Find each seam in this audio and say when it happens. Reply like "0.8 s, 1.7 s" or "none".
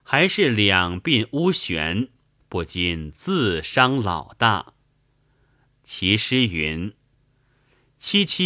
2.4 s, 5.7 s